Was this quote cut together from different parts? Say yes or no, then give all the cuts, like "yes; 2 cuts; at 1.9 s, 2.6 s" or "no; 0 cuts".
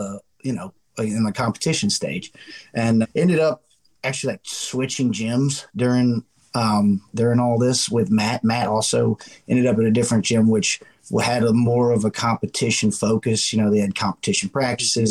yes; 1 cut; at 3.0 s